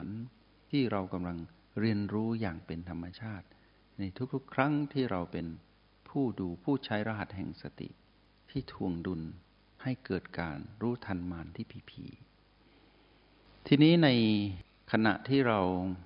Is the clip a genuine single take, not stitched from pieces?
yes; 0 cuts

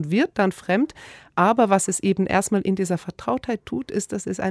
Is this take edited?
no; 0 cuts

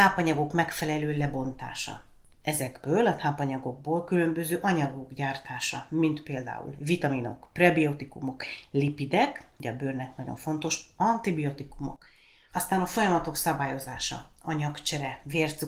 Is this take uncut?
no; 1 cut; at 12.5 s

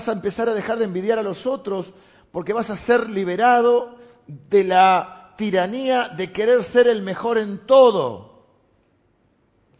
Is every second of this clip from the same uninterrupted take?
yes; 0 cuts

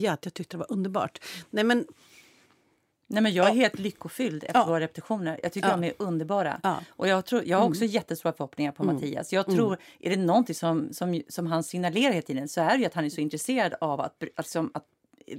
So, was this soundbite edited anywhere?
no; 0 cuts

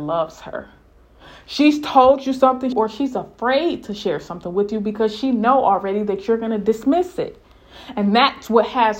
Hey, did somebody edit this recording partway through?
yes; 1 cut; at 2.7 s

